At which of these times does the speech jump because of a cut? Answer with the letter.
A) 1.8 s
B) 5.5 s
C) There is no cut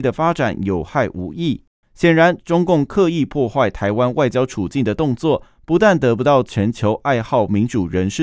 A